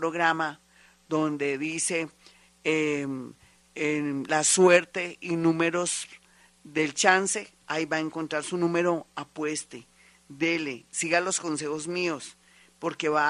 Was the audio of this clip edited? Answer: no; 0 cuts

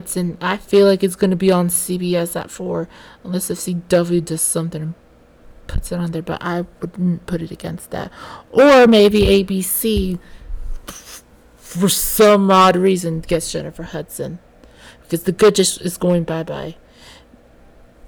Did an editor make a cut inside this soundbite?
no; 0 cuts

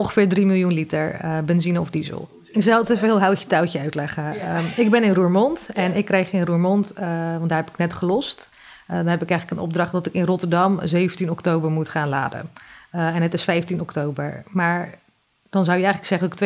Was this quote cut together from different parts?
no; 0 cuts

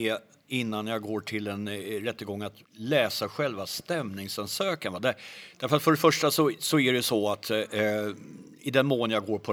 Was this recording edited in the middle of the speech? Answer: yes; 1 cut; at 2.6 s

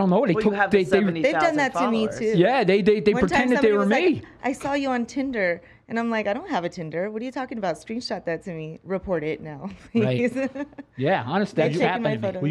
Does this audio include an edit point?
no; 0 cuts

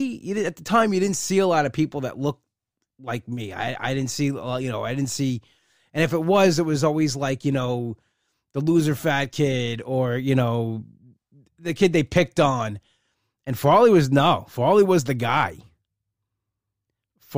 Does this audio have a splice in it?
no; 0 cuts

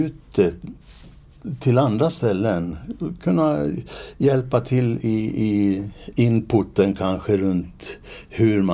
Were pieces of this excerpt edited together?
no; 0 cuts

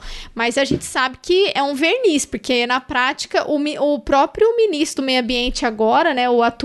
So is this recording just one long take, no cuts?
yes; 0 cuts

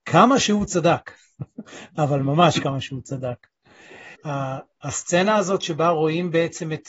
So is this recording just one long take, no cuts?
no; 1 cut; at 4.2 s

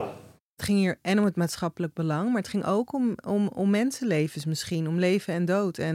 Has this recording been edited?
no; 0 cuts

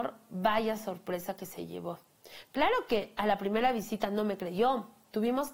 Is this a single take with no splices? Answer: yes; 0 cuts

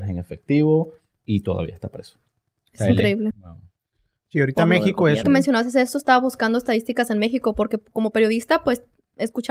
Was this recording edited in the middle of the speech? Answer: yes; 2 cuts; at 3.3 s, 5.2 s

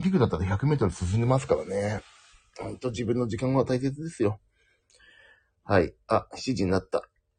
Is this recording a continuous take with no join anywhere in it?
yes; 0 cuts

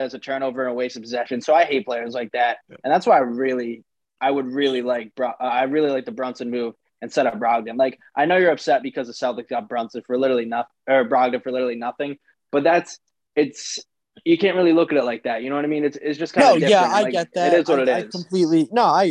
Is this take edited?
no; 0 cuts

